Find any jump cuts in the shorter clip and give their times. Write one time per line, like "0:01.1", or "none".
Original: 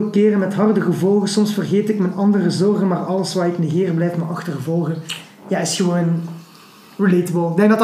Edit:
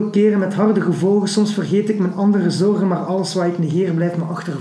none